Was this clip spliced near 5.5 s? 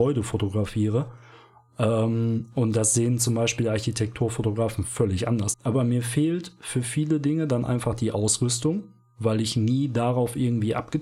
yes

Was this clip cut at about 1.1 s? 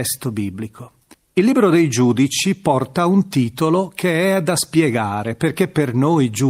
yes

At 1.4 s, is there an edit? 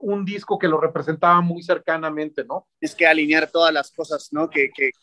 no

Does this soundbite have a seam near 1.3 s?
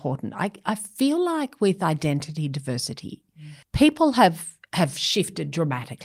no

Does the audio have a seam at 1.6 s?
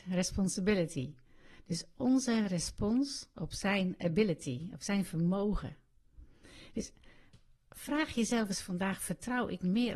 no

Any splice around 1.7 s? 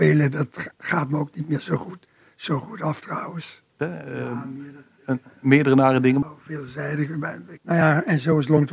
no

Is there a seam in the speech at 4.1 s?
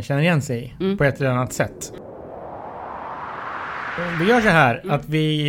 no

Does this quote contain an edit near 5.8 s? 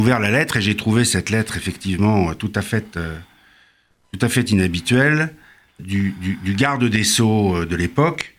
yes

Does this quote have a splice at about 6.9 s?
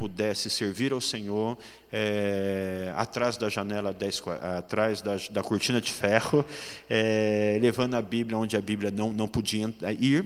no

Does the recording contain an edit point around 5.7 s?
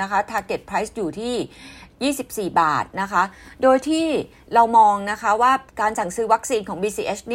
yes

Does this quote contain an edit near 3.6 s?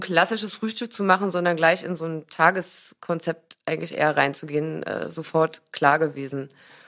no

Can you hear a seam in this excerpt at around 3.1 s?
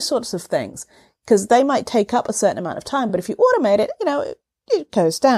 no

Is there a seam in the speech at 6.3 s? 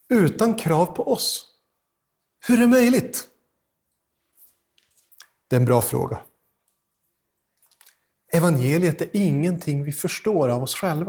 no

